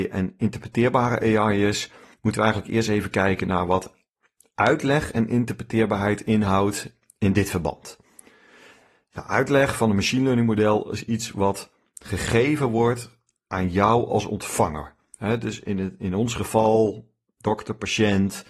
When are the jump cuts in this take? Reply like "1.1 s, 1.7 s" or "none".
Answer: none